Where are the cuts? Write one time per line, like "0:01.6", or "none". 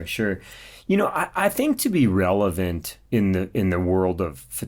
0:03.1